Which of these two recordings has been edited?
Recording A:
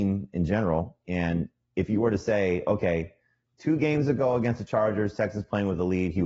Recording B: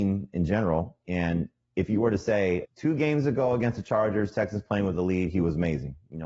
B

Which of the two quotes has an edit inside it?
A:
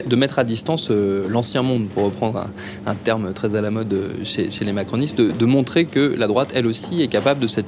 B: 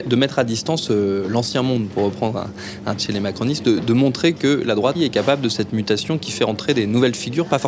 B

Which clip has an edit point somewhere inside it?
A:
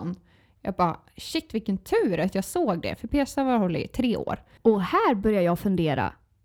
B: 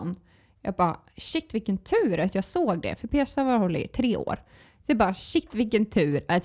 A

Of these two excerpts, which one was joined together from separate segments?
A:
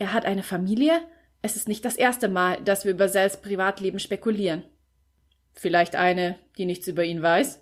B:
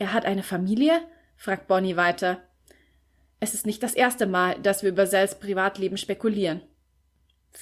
A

